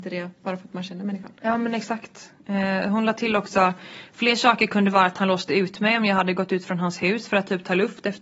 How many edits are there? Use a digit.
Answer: 0